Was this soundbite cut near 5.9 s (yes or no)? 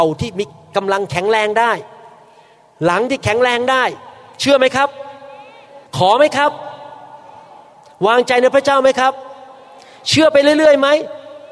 yes